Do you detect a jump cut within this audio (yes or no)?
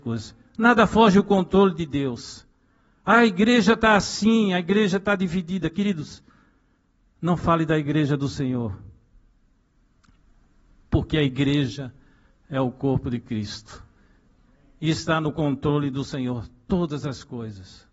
no